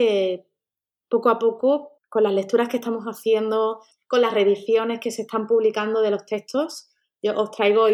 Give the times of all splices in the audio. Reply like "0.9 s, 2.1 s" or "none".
2.0 s, 3.9 s